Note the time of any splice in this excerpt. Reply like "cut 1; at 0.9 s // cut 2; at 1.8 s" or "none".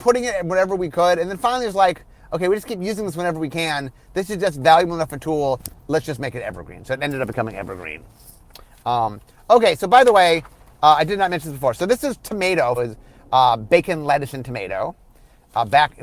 cut 1; at 12.8 s